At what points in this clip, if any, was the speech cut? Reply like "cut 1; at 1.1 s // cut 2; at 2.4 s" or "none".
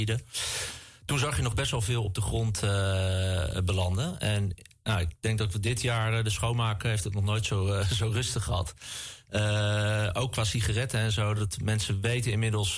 none